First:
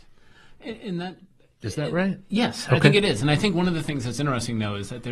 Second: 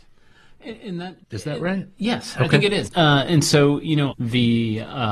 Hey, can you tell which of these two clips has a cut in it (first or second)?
second